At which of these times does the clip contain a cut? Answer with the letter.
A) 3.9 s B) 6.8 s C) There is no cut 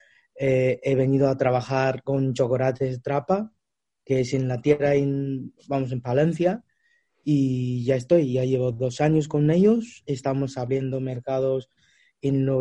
C